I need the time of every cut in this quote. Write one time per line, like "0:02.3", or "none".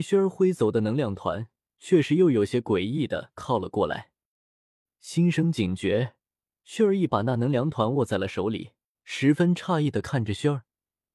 0:07.1
0:08.9

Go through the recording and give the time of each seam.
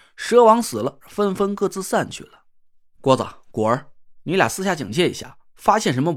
0:01.0

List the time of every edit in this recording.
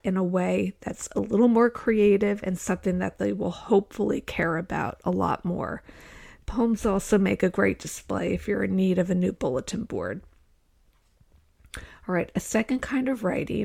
none

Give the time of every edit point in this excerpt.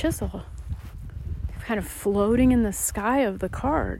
none

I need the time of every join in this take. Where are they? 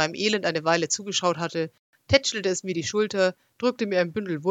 none

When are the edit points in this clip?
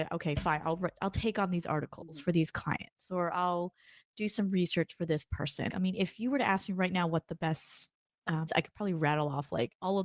0:05.7
0:08.5

